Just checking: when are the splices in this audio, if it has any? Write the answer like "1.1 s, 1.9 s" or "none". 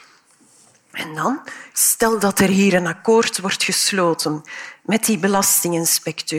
1.7 s